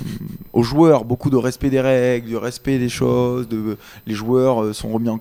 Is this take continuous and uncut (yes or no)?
yes